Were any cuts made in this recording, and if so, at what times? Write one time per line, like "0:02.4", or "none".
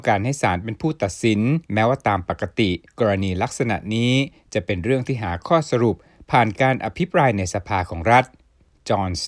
0:01.6
0:02.9